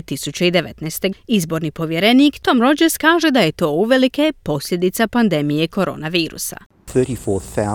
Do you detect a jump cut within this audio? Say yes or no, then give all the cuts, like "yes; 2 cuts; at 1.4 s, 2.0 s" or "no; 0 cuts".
yes; 1 cut; at 1.1 s